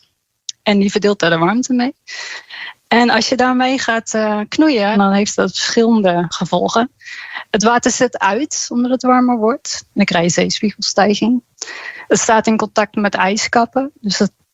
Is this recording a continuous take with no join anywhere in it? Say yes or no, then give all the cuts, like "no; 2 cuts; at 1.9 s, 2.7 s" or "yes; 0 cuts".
no; 1 cut; at 4.9 s